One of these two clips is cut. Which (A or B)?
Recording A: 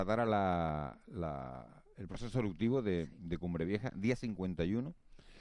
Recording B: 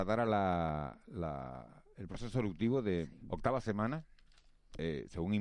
B